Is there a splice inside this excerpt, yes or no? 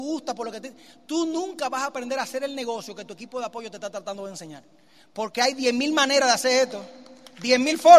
no